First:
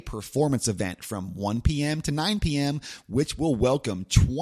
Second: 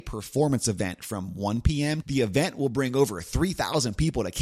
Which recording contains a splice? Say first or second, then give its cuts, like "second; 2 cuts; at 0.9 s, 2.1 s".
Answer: second; 1 cut; at 2.0 s